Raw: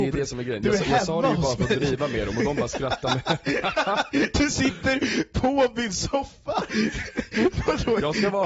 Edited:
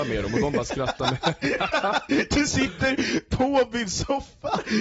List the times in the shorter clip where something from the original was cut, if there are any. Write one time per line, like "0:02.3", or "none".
none